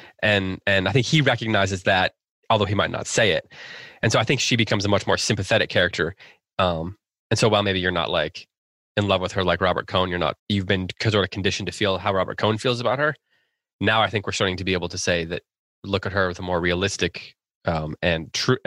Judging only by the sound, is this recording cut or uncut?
cut